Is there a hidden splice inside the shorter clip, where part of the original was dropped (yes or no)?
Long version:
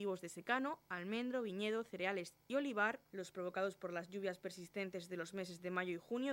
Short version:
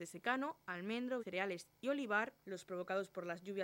yes